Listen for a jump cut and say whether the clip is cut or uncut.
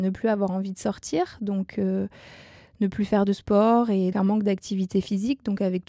cut